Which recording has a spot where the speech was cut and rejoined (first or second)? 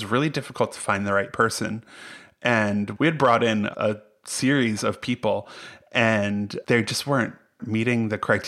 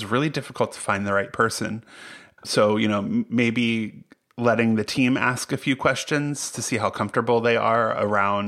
second